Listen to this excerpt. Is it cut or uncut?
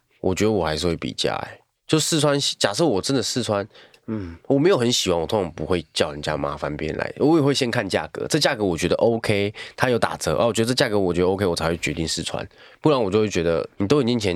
uncut